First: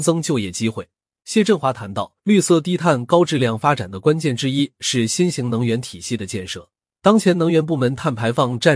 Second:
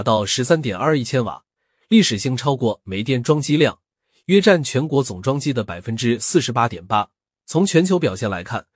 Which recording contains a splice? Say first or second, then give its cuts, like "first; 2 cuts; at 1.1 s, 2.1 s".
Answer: first; 1 cut; at 2.2 s